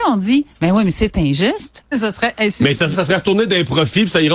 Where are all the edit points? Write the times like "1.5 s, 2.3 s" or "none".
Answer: 1.9 s, 2.9 s